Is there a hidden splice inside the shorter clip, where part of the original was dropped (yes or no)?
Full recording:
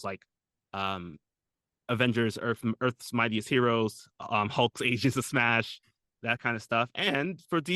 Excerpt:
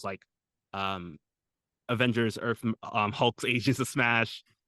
yes